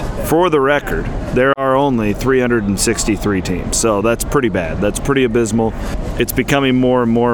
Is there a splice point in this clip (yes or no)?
no